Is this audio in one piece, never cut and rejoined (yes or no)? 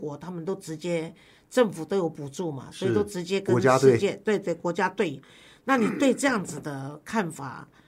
yes